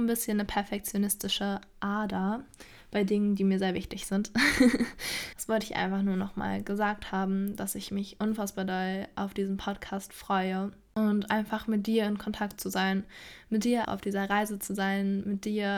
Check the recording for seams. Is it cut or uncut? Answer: cut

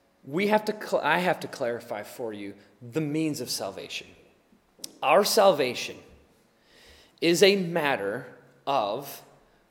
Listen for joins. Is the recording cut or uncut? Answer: uncut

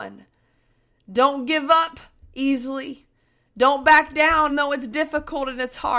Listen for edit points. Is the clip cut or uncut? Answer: cut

